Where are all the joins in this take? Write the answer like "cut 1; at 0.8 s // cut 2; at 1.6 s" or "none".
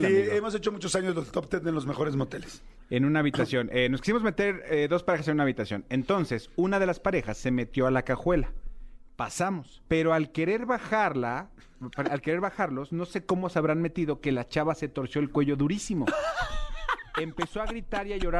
cut 1; at 9.9 s

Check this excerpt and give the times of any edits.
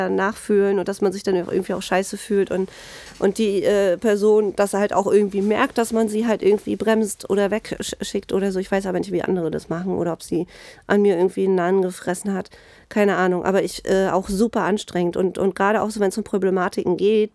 none

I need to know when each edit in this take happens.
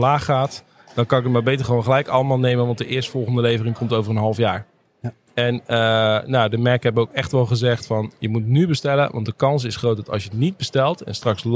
none

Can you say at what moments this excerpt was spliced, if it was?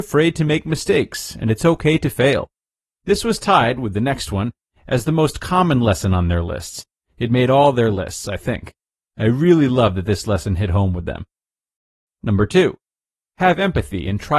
none

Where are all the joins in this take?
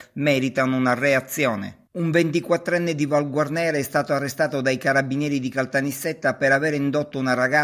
cut 1; at 1.9 s

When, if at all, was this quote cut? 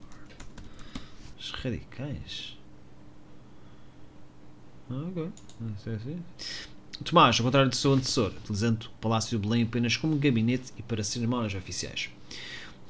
cut 1; at 1.3 s // cut 2; at 6.3 s // cut 3; at 8.4 s

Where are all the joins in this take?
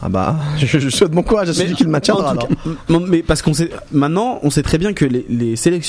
none

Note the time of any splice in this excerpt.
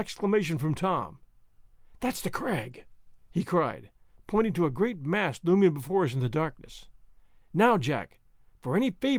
none

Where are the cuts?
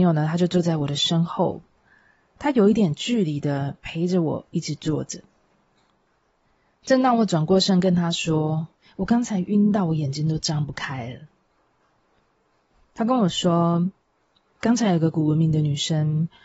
none

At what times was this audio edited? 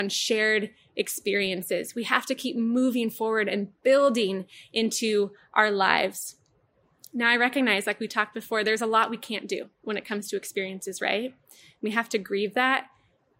none

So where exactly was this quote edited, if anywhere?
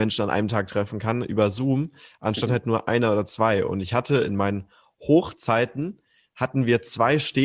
none

